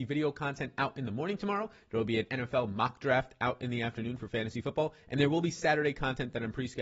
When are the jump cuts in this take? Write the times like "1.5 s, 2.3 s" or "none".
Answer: none